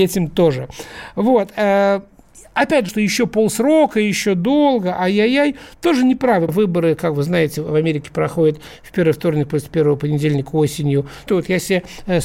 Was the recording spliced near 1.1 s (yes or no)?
no